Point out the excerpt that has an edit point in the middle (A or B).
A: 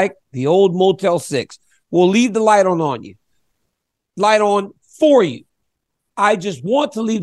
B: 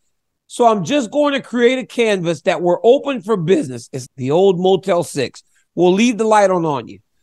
B